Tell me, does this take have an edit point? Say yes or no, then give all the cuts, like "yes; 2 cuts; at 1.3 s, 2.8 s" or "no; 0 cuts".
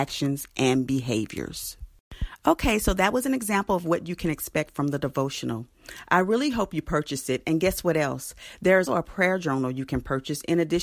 yes; 1 cut; at 8.9 s